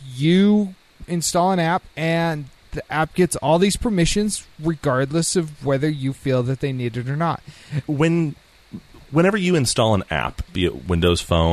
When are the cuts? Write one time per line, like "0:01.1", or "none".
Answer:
0:07.8
0:10.5